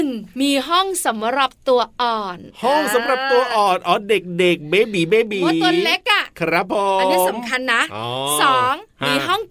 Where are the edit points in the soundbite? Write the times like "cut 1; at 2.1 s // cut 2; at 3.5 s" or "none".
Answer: none